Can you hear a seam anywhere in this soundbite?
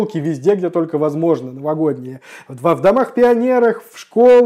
no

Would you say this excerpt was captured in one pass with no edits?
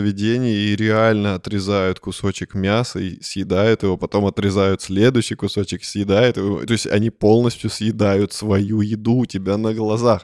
yes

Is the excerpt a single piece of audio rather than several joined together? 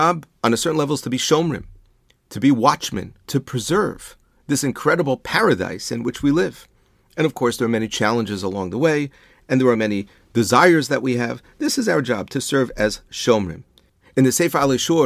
no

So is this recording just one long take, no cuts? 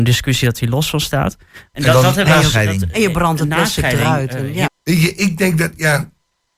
no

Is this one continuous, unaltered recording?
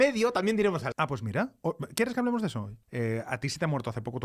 no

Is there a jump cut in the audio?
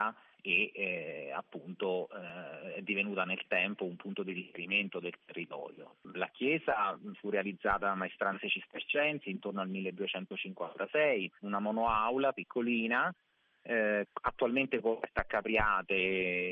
yes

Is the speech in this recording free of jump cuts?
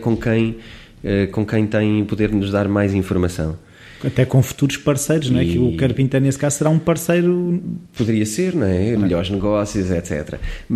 no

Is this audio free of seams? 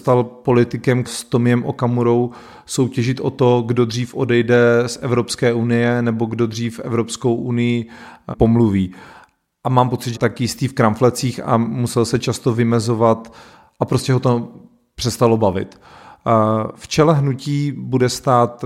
no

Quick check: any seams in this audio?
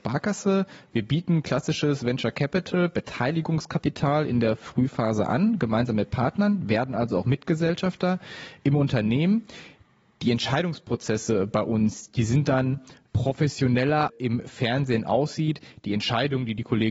yes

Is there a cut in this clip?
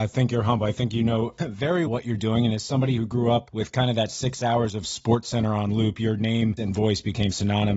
yes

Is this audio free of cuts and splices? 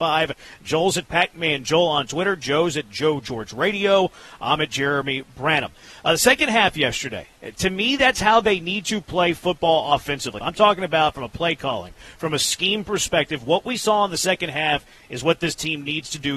no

